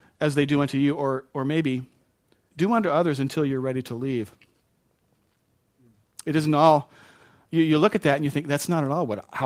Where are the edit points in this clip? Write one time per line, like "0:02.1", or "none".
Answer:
none